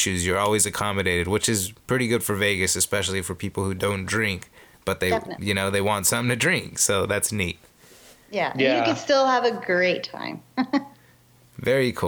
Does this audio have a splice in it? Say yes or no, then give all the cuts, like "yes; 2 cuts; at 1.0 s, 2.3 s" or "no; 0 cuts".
no; 0 cuts